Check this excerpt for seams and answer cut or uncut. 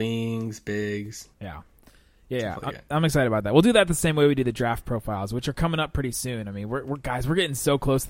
cut